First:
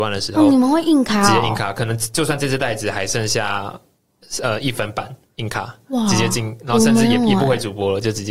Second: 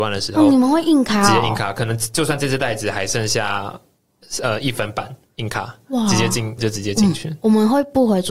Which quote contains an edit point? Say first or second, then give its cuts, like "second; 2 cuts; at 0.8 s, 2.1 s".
second; 1 cut; at 6.6 s